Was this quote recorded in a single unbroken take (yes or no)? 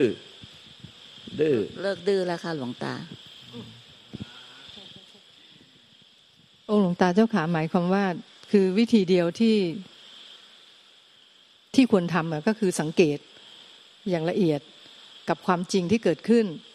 yes